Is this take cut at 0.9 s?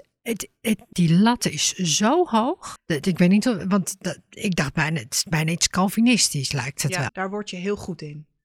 yes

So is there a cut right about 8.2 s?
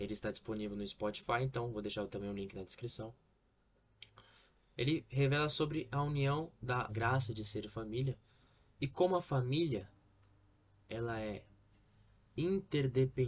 no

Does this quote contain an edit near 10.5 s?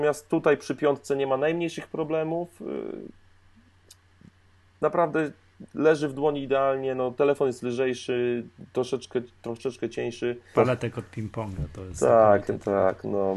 yes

